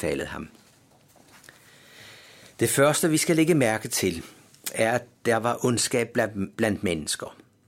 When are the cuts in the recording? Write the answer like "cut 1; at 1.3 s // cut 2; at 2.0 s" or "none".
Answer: none